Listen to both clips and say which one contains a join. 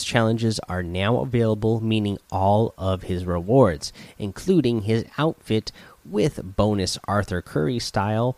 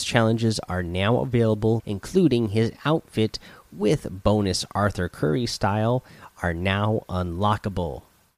second; 1 cut; at 1.8 s

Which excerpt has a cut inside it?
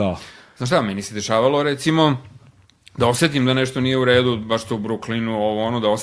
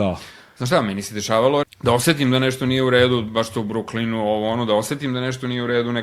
second; 1 cut; at 1.6 s

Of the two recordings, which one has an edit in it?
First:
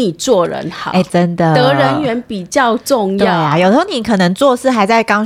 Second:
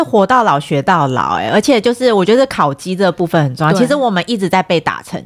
first; 1 cut; at 1.1 s

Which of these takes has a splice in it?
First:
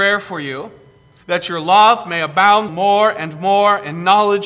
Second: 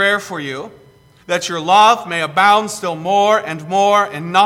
first; 1 cut; at 2.7 s

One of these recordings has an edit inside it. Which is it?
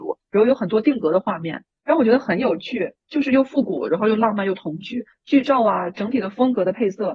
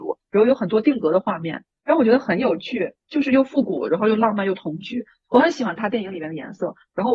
first; 1 cut; at 5.1 s

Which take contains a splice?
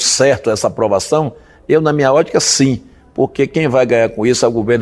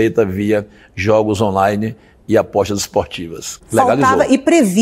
second; 1 cut; at 3.6 s

